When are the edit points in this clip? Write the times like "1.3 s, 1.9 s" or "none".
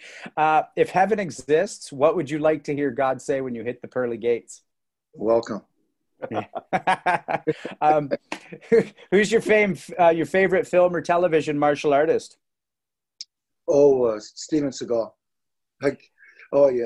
none